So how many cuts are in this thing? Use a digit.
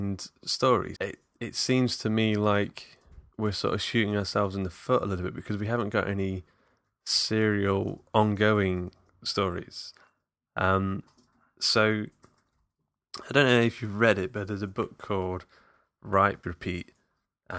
2